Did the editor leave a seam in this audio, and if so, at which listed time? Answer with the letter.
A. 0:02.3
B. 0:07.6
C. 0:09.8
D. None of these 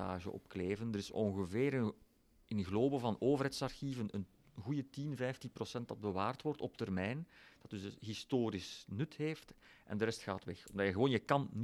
D